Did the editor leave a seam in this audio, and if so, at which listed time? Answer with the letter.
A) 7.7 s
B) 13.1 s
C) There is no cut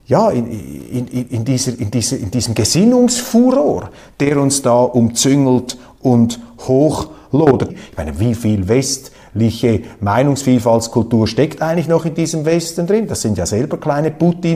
A